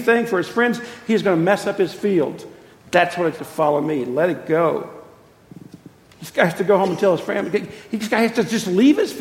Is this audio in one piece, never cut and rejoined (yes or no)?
no